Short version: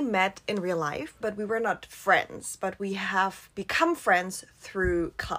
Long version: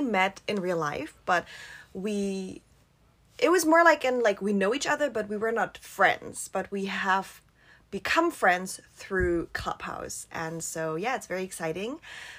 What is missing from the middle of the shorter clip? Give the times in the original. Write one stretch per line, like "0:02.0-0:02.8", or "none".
0:01.2-0:05.1
0:07.4-0:07.9